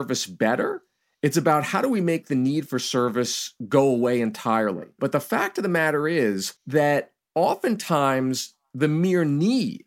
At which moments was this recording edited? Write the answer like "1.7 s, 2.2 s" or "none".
5.0 s, 6.6 s